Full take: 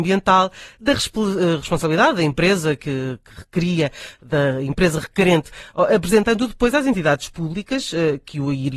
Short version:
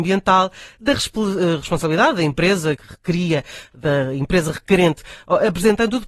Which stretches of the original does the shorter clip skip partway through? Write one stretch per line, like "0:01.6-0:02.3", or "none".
0:02.8-0:03.2